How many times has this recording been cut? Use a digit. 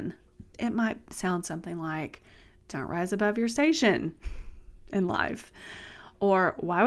0